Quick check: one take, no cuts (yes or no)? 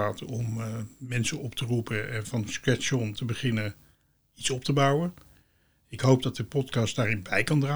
yes